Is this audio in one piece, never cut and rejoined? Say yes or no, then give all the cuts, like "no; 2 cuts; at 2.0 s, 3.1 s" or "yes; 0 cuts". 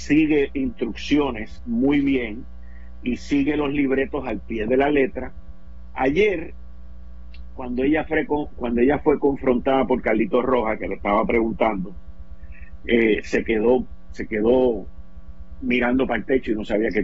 yes; 0 cuts